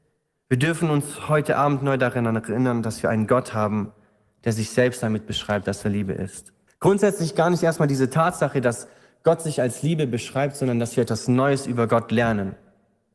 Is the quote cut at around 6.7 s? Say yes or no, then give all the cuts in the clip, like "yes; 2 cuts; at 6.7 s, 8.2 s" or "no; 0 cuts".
yes; 1 cut; at 6.7 s